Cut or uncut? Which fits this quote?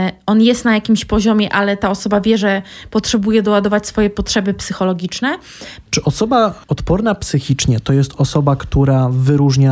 cut